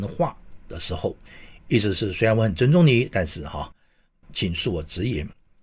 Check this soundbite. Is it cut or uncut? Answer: uncut